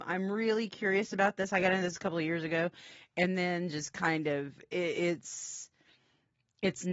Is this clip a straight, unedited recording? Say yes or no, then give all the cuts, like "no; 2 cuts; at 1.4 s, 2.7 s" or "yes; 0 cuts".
yes; 0 cuts